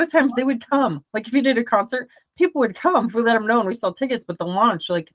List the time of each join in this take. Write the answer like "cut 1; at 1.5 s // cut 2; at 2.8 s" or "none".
none